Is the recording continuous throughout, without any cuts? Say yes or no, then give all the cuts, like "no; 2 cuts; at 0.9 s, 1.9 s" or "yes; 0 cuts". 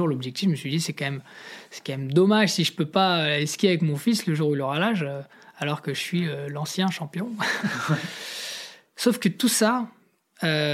yes; 0 cuts